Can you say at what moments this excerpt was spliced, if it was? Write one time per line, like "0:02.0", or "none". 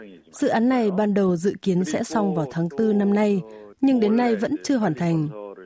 0:03.7